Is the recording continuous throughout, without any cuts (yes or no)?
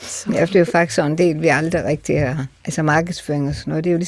yes